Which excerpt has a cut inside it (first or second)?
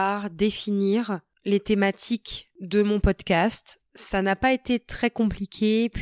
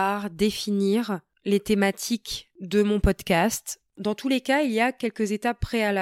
second